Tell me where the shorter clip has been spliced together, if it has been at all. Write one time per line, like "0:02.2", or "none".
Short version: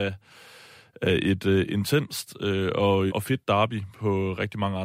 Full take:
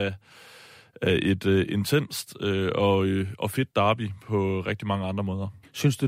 0:03.1

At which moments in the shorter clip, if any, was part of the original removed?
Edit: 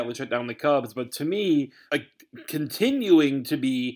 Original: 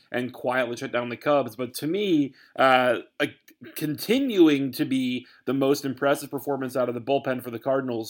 0:01.9

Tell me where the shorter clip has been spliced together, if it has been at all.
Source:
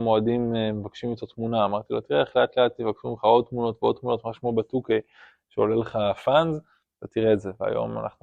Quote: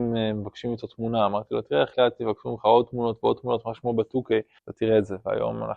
0:01.9
0:04.6

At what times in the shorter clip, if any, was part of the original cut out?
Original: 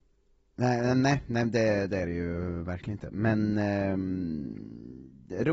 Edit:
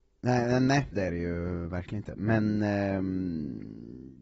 0:00.9

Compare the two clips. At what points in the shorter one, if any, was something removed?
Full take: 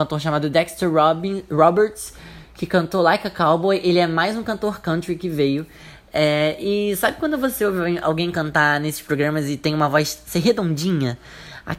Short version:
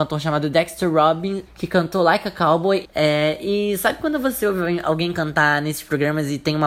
0:01.5
0:02.8

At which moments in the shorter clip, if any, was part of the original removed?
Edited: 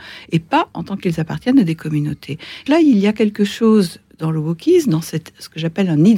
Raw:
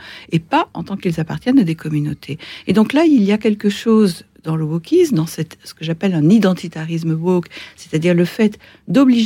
0:02.7

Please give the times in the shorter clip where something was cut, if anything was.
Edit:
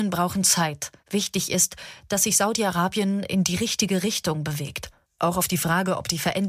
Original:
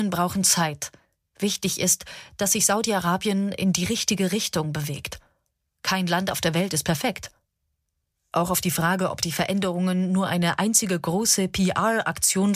0:01.0
0:05.0

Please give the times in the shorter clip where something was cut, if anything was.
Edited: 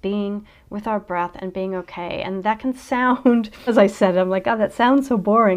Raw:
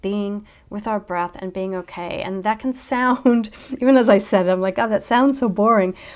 0:03.7

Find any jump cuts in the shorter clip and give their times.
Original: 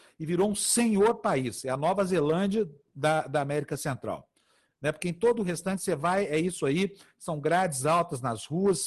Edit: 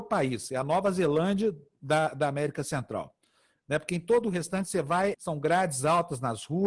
0:05.1

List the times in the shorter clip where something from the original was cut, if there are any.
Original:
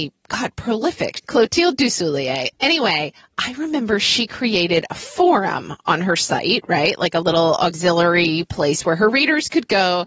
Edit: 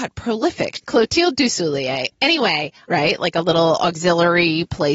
0:02.9

